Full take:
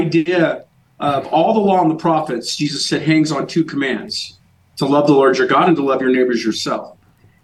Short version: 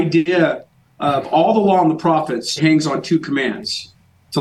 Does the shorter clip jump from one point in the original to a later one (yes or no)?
yes